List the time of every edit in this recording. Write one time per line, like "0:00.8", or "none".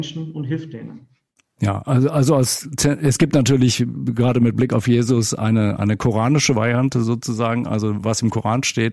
none

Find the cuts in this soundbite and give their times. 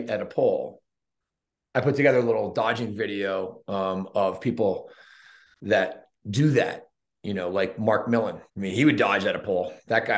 0:08.5

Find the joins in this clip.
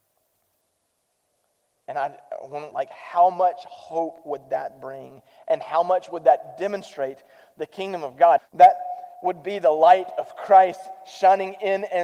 0:02.7
0:08.4

